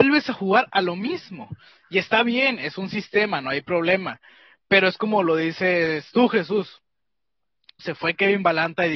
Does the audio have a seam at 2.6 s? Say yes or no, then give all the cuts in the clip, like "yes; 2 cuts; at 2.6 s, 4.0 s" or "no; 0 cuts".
no; 1 cut; at 7.8 s